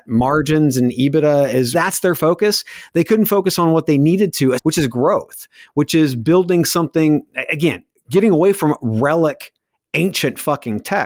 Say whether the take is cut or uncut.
cut